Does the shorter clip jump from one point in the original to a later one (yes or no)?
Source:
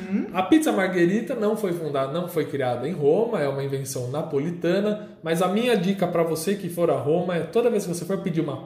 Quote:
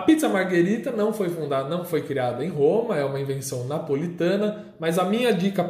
no